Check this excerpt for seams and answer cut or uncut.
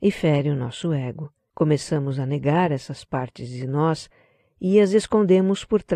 cut